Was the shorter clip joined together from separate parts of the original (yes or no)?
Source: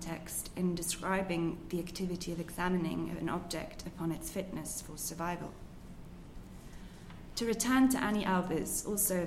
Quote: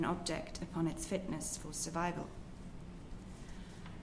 no